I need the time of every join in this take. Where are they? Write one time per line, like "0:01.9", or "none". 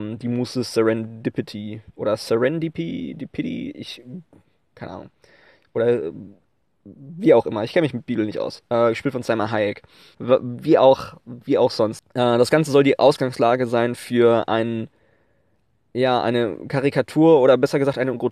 0:10.1
0:12.0